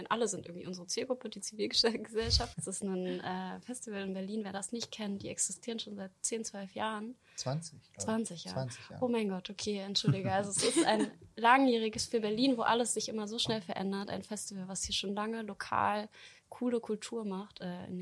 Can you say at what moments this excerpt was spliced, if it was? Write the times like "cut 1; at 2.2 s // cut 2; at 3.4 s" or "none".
cut 1; at 2.5 s